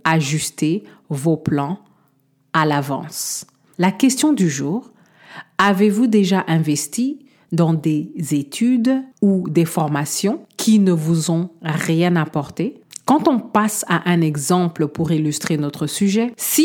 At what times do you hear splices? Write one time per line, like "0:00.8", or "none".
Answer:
0:03.7
0:09.1